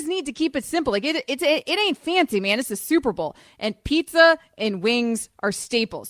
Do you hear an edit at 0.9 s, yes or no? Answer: no